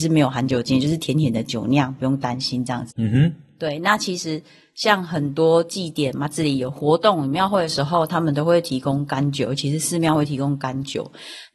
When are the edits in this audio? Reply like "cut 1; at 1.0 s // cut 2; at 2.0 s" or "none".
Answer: cut 1; at 2.9 s